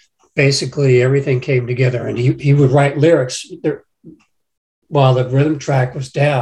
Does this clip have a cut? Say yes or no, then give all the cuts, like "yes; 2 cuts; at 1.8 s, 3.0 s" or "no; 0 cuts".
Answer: no; 0 cuts